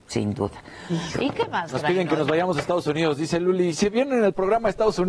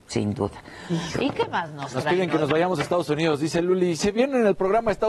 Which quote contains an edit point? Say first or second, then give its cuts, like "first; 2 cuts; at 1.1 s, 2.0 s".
first; 1 cut; at 1.7 s